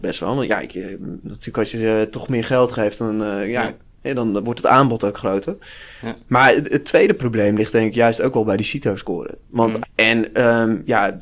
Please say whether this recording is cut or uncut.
cut